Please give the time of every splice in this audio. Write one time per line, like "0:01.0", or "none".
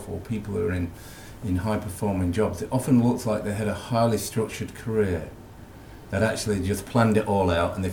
none